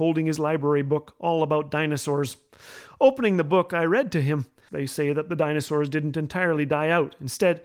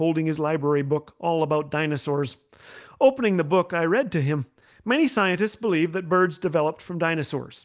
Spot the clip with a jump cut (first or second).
first